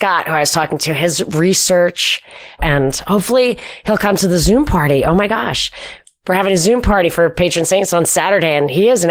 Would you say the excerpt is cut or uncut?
cut